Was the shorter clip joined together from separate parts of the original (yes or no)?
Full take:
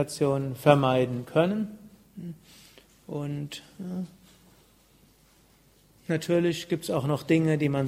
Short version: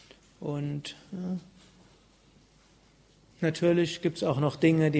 no